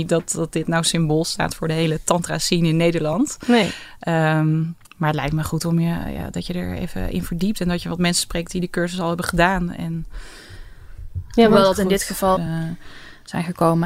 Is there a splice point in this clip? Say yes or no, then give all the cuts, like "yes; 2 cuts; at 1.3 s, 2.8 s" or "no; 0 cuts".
yes; 2 cuts; at 4.8 s, 12.4 s